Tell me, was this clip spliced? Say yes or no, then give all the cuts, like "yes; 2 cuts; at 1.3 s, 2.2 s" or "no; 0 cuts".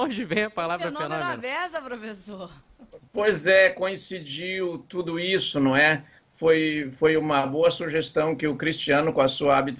no; 0 cuts